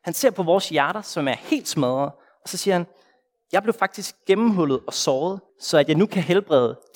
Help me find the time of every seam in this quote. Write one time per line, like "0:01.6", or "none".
0:05.5

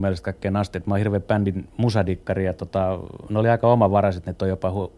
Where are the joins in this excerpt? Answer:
none

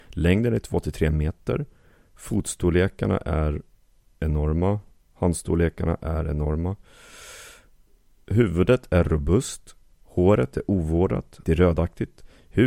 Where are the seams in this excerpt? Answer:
0:10.0
0:11.4

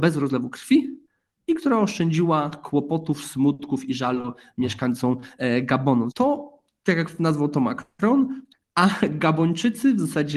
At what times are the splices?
0:06.1
0:08.5

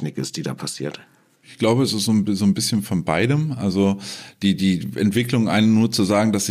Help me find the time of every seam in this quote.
none

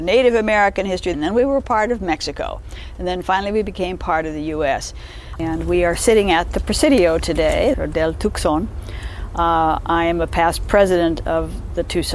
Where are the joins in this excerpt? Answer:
0:01.1
0:05.4
0:07.7

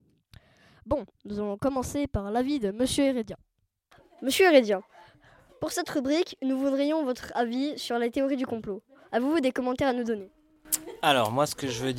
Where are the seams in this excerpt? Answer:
none

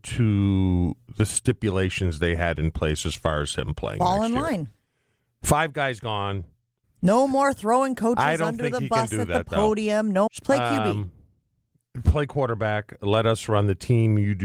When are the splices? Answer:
0:06.8
0:10.3

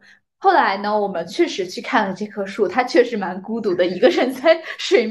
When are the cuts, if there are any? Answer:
none

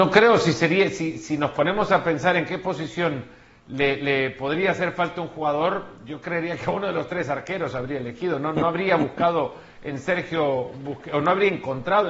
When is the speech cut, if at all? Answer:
none

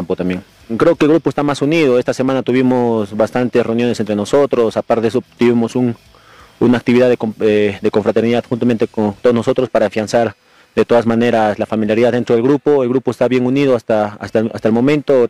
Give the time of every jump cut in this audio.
none

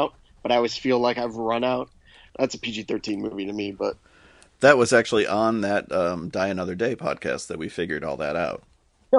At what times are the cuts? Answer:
0:02.3

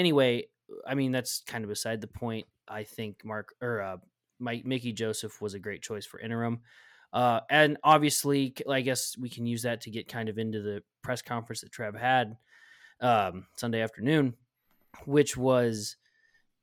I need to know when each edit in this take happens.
none

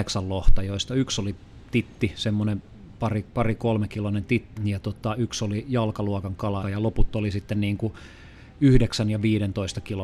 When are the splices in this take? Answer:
0:04.6
0:06.6

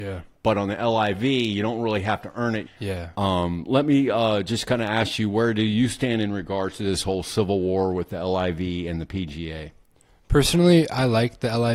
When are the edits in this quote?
0:02.7

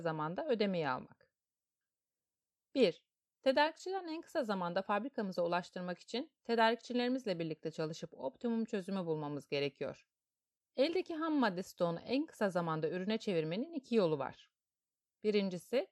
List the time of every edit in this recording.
0:10.6

